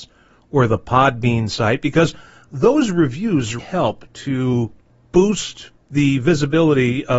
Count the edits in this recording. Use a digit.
1